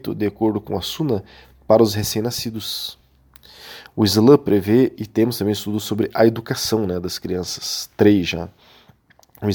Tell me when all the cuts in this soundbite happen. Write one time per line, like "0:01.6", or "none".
none